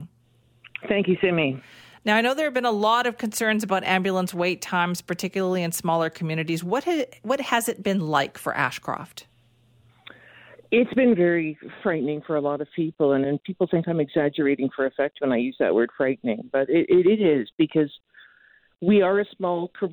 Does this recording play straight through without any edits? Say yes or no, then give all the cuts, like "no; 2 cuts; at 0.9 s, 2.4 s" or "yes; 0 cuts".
no; 1 cut; at 13.2 s